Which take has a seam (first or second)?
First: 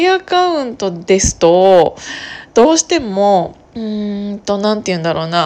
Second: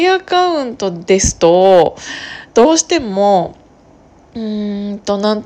first